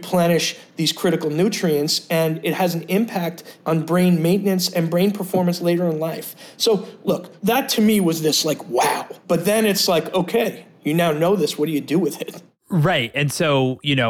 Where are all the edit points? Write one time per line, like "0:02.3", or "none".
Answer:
none